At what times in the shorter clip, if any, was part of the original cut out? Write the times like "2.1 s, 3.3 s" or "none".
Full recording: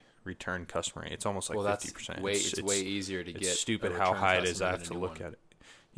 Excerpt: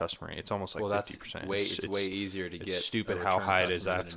none